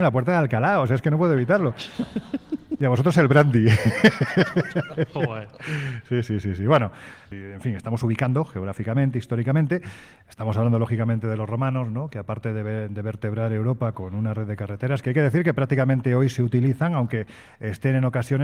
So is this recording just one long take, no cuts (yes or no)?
yes